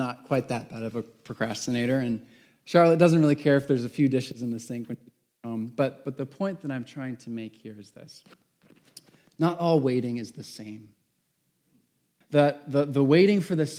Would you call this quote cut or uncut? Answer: cut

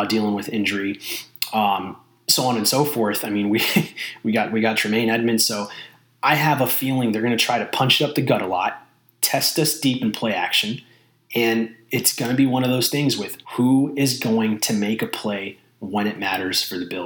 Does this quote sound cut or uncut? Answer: cut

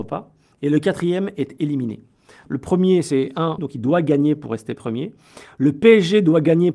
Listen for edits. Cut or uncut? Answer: cut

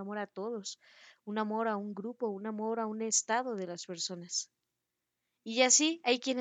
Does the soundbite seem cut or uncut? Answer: uncut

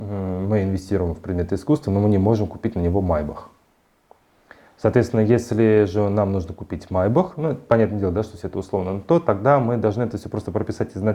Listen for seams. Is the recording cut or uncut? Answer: uncut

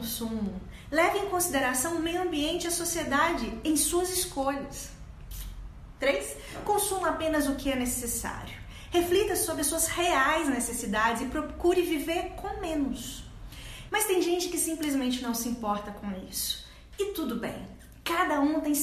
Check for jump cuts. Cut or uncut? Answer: cut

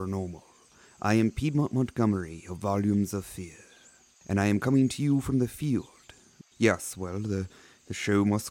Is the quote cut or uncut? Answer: cut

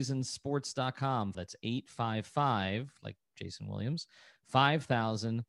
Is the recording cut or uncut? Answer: cut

